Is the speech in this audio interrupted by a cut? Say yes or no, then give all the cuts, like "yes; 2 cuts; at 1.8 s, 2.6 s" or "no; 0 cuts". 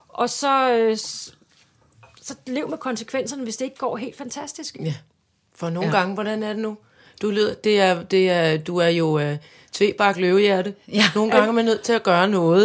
no; 0 cuts